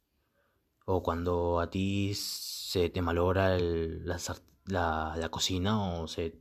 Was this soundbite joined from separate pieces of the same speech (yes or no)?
no